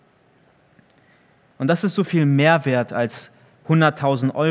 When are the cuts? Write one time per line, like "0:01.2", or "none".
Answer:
none